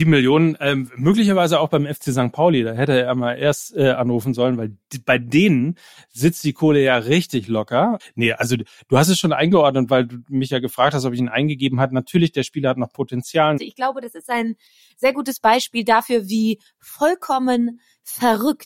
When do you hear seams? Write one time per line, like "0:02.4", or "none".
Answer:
0:08.0
0:13.6